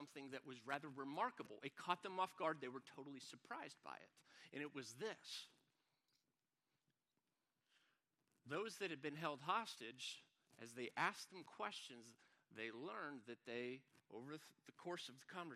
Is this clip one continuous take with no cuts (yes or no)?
yes